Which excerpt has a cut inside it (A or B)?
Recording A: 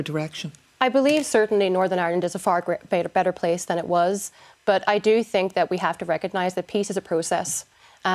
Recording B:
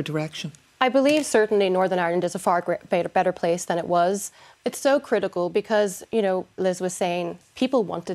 B